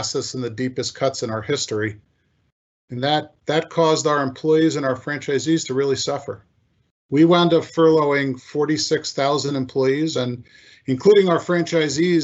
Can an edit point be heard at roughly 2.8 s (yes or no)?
no